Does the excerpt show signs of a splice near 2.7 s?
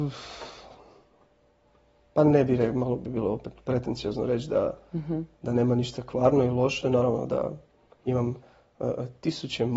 no; 0 cuts

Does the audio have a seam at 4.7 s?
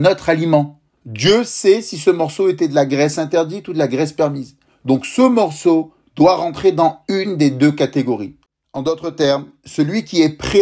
no; 1 cut; at 0.9 s

